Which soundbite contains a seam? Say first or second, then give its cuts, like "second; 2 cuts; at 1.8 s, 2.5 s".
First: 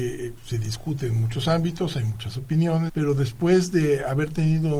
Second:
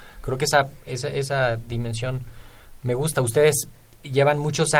first; 1 cut; at 2.9 s